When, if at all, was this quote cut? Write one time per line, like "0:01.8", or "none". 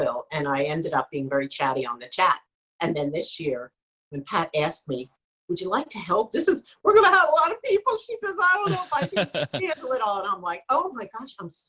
none